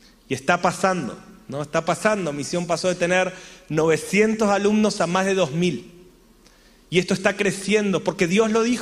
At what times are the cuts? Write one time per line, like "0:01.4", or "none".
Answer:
none